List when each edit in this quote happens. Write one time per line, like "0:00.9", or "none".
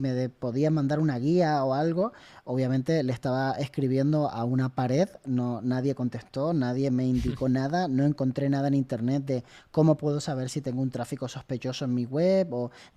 none